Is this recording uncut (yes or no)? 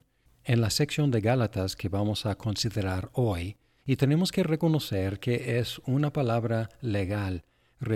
no